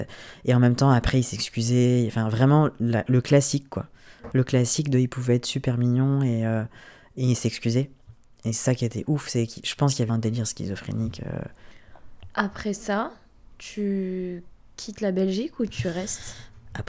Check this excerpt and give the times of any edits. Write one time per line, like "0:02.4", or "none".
0:10.1